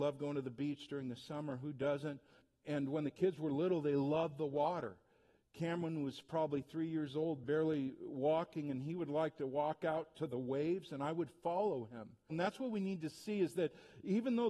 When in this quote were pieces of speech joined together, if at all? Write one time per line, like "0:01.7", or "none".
0:12.3